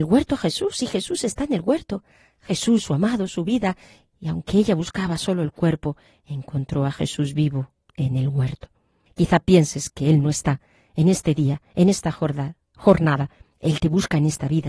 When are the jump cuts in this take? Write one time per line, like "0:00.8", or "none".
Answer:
0:09.1
0:13.5